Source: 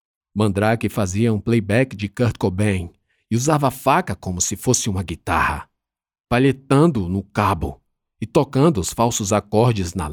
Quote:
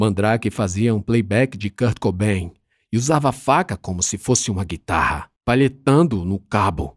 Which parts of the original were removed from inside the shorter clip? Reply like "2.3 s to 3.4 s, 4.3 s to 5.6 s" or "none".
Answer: 5.7 s to 6.2 s